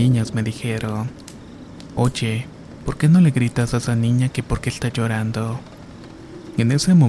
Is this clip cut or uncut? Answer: uncut